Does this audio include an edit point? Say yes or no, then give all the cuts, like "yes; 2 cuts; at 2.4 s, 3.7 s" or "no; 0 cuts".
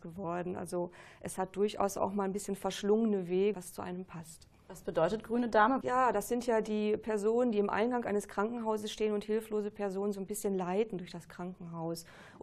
yes; 2 cuts; at 3.5 s, 5.8 s